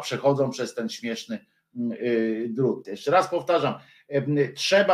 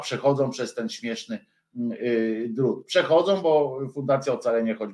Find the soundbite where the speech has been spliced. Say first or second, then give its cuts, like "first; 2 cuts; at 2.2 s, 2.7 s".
first; 1 cut; at 2.8 s